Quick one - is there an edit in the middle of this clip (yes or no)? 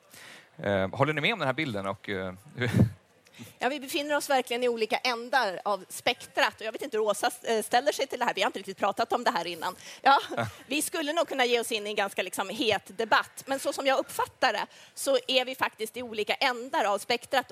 yes